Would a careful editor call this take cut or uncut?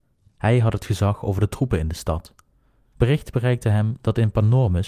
cut